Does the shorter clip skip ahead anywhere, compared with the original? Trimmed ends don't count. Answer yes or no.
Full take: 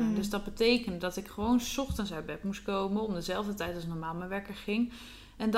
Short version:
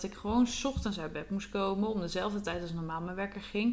no